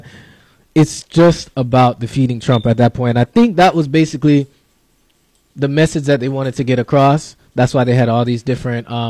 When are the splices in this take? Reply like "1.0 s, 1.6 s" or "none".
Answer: none